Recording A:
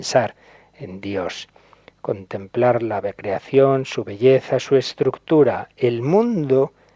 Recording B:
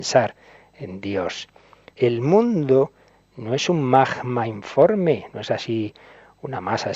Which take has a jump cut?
B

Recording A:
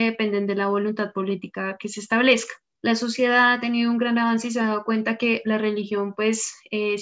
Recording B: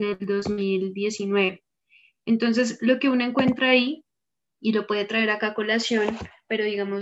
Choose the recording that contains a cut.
A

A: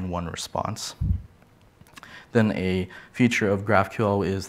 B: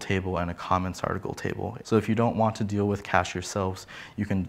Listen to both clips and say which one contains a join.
B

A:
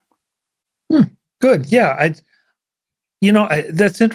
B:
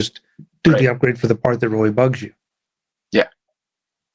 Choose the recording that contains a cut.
A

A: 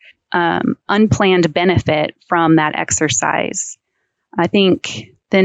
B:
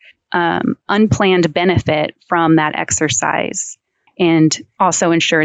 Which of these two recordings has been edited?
B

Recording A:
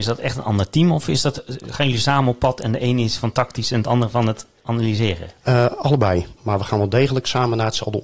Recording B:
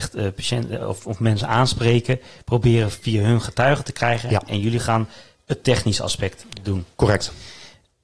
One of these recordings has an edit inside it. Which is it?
A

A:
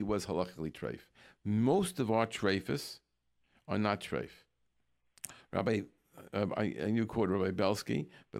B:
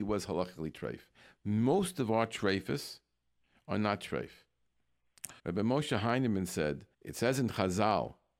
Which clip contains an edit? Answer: B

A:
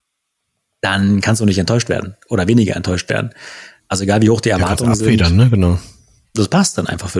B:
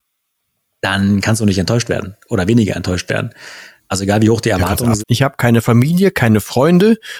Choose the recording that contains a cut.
B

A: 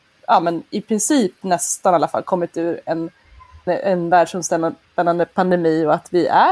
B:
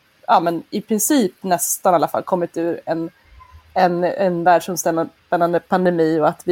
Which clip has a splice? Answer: A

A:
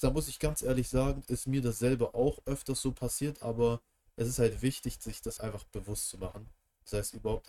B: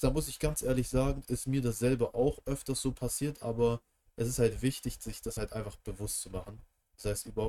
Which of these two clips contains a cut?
A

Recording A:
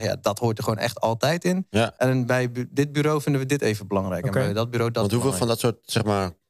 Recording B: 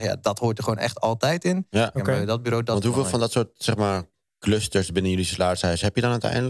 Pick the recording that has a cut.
B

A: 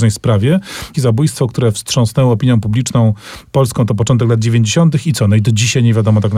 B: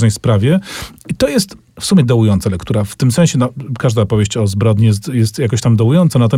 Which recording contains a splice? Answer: A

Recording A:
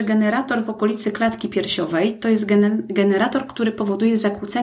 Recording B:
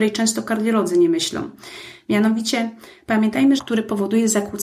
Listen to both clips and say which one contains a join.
B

